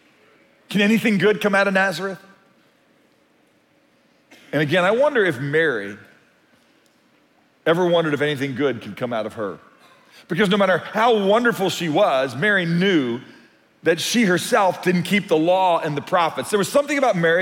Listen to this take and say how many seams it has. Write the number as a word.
zero